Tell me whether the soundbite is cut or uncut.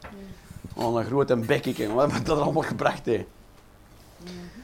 uncut